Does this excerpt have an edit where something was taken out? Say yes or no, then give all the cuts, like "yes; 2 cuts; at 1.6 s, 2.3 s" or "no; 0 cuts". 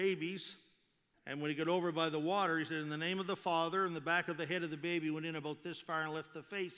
yes; 1 cut; at 1.1 s